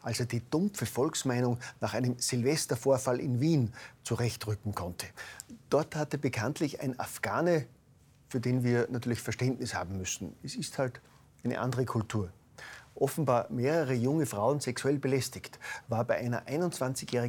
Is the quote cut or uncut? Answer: uncut